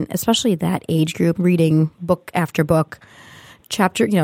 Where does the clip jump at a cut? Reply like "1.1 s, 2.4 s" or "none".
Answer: 1.3 s